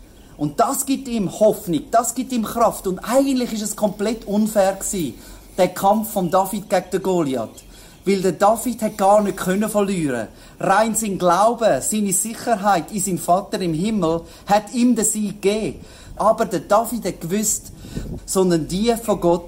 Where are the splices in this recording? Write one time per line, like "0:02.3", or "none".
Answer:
0:16.2
0:18.2